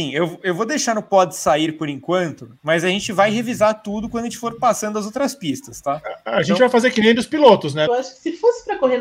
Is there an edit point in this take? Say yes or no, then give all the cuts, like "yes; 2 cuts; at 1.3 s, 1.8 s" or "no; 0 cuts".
yes; 1 cut; at 7.9 s